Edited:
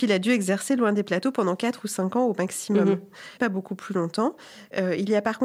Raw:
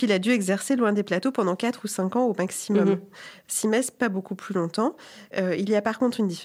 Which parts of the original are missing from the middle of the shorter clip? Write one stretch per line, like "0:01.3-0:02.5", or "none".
0:03.4-0:04.0